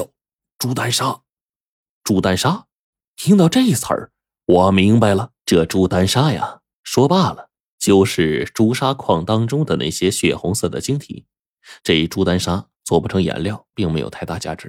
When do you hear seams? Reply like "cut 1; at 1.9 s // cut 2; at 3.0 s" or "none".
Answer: cut 1; at 5.4 s // cut 2; at 11.8 s // cut 3; at 13.7 s